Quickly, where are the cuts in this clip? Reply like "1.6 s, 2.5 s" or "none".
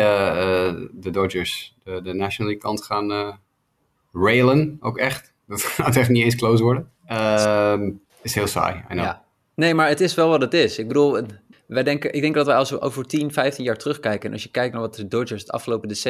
7.0 s, 8.1 s, 11.5 s